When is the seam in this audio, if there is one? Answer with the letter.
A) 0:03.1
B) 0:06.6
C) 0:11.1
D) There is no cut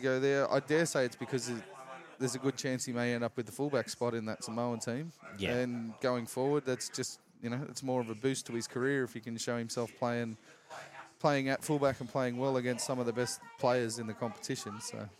D